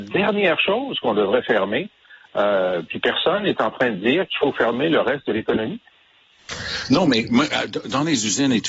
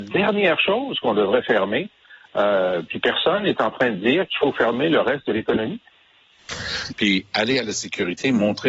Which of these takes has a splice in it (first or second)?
second